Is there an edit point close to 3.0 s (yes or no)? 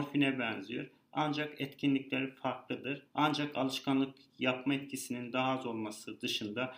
yes